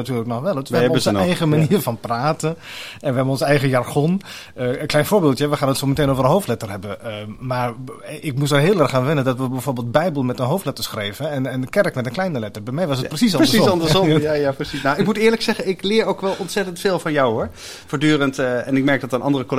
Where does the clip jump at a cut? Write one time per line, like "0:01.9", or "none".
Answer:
none